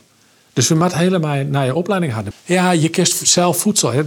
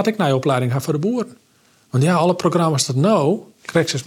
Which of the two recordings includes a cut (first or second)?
first